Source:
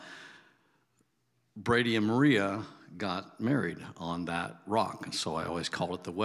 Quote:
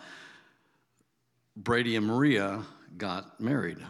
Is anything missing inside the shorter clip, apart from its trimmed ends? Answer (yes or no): no